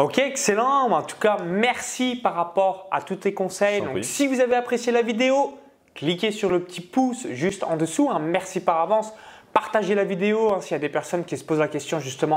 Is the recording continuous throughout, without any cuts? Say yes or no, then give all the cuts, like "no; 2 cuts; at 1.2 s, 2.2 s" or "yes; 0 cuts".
yes; 0 cuts